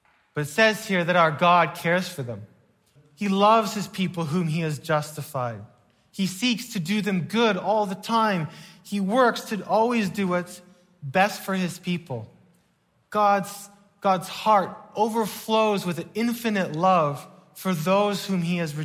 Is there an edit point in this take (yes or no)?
yes